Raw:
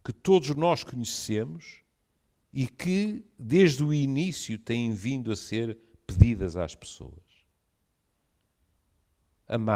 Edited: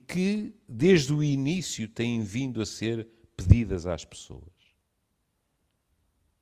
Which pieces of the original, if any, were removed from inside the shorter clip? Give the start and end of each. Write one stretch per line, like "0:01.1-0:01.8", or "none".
none